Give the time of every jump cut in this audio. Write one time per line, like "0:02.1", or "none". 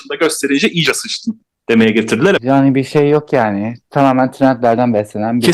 0:02.4